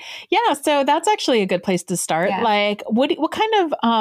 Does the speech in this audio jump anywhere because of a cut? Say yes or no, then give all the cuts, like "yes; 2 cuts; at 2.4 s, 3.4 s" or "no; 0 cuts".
no; 0 cuts